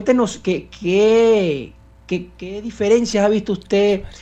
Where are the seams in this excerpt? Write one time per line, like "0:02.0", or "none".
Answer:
none